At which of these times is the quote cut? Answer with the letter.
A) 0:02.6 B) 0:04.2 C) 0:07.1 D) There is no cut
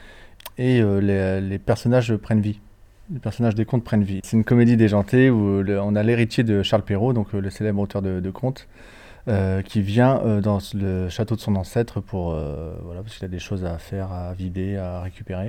B